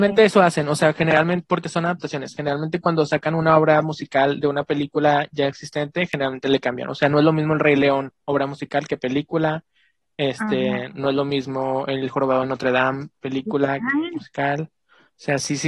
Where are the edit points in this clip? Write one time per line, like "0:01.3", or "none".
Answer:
none

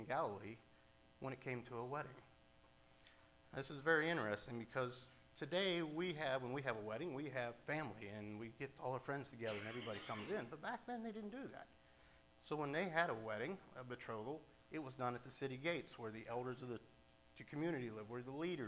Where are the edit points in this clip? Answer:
0:12.3

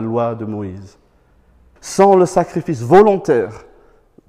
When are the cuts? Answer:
0:01.8

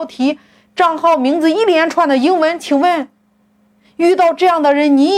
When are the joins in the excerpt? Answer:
none

